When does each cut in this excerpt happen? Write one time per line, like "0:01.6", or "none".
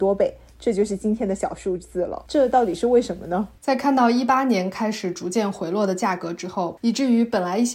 0:03.6
0:06.8